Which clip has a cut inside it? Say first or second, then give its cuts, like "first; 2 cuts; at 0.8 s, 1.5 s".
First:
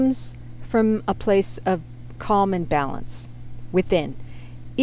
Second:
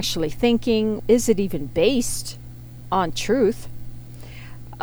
second; 1 cut; at 1.0 s